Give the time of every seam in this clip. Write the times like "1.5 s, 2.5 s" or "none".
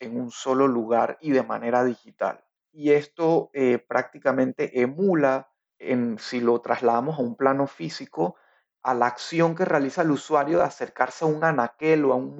2.6 s